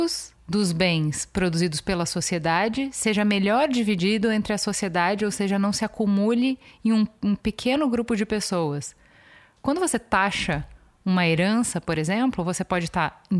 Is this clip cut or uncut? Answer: uncut